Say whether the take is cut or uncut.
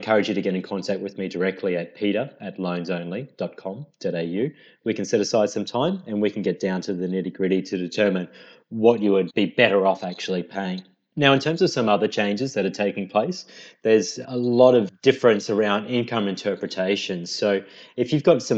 uncut